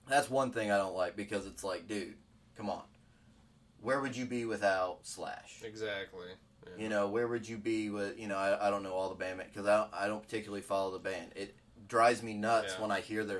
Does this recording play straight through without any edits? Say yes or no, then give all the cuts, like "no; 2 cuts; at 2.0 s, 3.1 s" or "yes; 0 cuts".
yes; 0 cuts